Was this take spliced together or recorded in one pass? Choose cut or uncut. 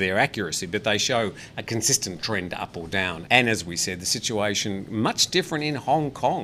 cut